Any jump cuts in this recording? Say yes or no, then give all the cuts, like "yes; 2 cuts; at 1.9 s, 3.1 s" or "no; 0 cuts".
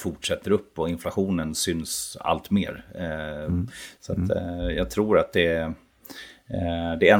yes; 1 cut; at 4.0 s